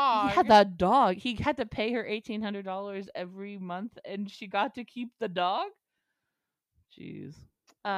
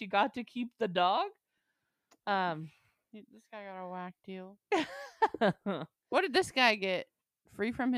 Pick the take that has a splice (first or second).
second